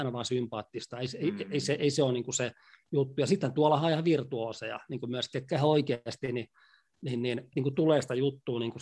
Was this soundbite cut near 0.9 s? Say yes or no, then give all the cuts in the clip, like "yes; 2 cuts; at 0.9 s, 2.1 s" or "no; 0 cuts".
no; 1 cut; at 7.5 s